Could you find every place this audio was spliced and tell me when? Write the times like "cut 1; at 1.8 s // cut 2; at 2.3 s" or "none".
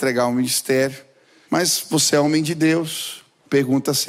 cut 1; at 1.4 s